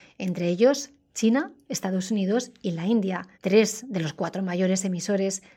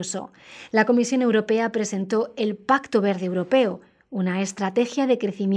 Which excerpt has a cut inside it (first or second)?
first